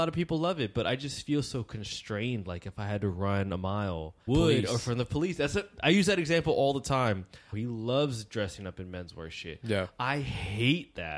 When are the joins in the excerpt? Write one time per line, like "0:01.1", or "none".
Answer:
0:04.3
0:07.5